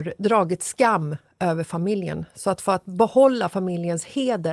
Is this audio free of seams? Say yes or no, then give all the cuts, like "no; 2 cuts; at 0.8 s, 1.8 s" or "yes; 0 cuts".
yes; 0 cuts